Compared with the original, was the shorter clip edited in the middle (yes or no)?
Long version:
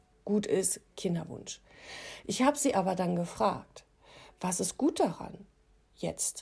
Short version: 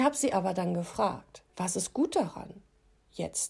yes